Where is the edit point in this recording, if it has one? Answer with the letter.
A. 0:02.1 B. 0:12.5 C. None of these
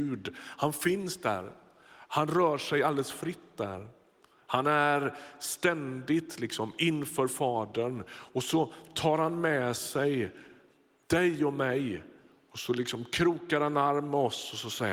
C